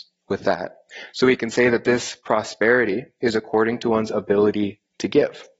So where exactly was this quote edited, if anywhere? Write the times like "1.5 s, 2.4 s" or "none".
none